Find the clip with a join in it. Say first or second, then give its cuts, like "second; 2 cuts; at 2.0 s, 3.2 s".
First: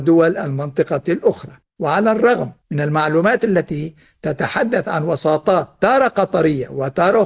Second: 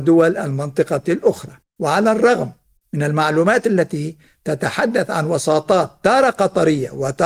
first; 1 cut; at 2.6 s